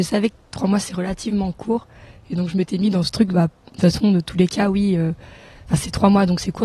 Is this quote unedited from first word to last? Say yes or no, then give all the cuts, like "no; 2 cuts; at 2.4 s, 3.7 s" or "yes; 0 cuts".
no; 1 cut; at 3.3 s